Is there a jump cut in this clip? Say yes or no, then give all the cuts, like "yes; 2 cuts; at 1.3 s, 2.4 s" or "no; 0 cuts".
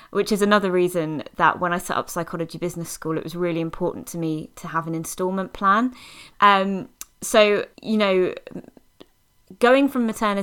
yes; 2 cuts; at 6.3 s, 7.7 s